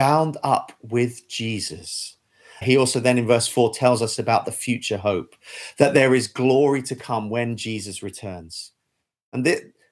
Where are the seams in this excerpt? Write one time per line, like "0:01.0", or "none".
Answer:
0:02.6